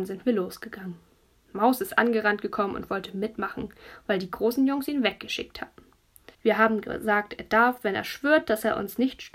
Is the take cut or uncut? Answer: cut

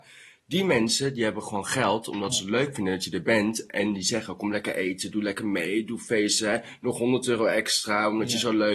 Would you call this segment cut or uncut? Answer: uncut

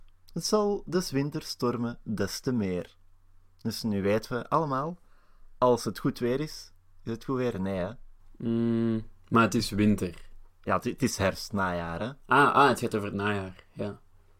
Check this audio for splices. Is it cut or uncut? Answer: uncut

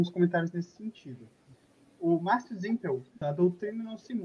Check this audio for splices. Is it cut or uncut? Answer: cut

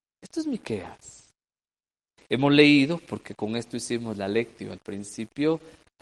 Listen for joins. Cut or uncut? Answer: uncut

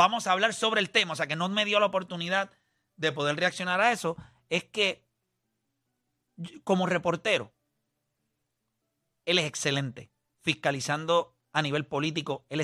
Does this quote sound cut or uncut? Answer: cut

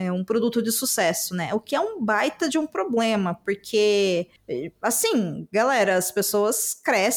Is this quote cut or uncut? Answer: uncut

